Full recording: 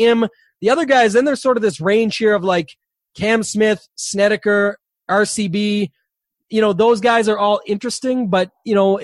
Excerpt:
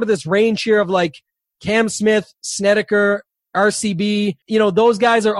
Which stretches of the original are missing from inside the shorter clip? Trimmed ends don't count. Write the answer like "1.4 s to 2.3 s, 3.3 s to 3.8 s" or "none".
6.0 s to 6.4 s